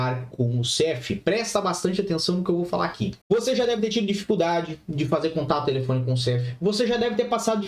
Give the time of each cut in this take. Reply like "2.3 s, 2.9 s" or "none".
3.2 s